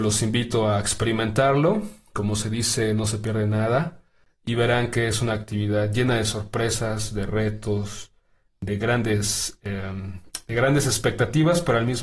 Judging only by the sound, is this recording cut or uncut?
uncut